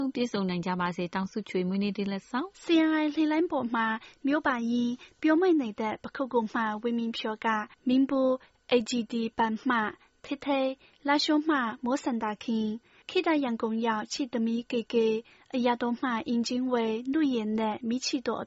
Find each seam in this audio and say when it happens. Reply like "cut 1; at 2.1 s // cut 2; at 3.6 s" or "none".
cut 1; at 2.5 s